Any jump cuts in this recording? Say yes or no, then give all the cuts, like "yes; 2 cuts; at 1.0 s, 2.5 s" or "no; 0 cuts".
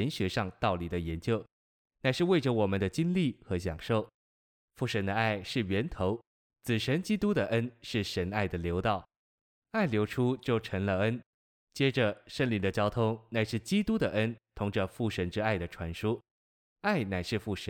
no; 0 cuts